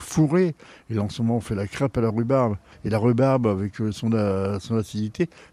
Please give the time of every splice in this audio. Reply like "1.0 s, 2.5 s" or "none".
none